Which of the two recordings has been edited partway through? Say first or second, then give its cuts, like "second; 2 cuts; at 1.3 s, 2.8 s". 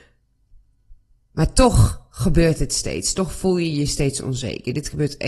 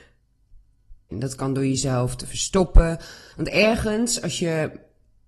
second; 2 cuts; at 1.1 s, 3.3 s